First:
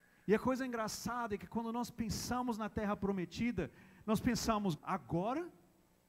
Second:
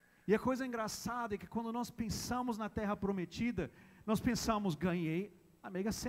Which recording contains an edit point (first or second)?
first